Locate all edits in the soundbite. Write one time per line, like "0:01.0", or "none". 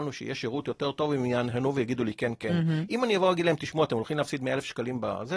none